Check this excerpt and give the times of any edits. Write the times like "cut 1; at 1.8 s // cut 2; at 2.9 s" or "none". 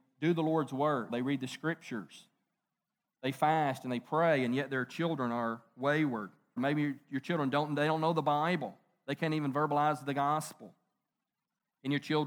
cut 1; at 1.1 s // cut 2; at 6.6 s